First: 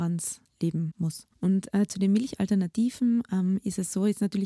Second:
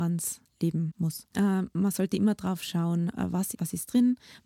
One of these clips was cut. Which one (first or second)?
second